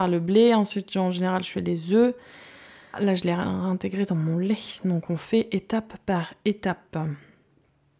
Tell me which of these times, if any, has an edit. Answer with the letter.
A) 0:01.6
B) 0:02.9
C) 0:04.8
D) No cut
B